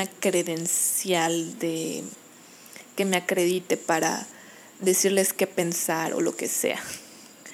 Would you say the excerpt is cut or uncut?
uncut